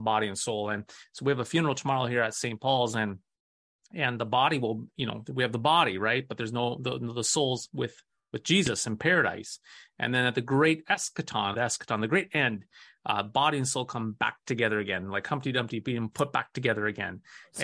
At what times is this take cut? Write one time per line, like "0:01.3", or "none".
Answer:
0:11.5